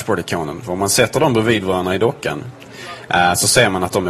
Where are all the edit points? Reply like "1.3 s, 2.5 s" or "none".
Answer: none